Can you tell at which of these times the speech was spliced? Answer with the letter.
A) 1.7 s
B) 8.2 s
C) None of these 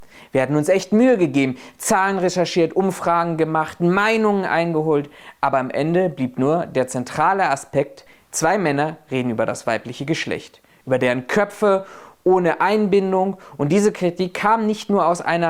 C